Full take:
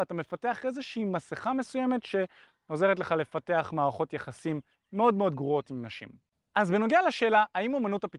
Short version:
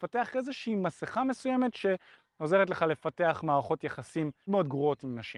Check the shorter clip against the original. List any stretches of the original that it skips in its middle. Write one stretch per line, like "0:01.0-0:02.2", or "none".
0:04.8-0:05.1